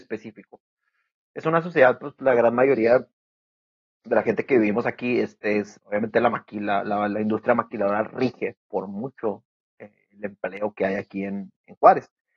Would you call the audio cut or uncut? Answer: cut